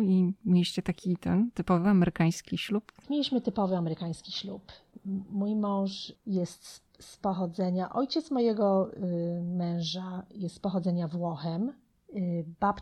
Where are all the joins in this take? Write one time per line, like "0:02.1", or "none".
none